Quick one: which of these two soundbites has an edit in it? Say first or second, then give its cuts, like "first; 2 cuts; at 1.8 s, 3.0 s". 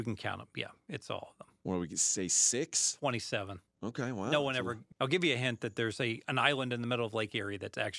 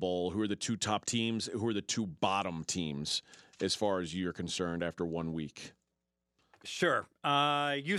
first; 2 cuts; at 3.7 s, 4.9 s